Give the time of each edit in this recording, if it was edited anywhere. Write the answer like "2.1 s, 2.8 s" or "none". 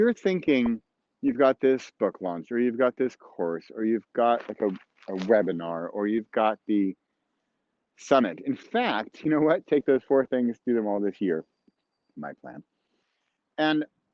none